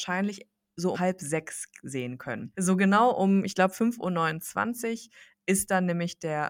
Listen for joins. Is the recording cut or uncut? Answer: cut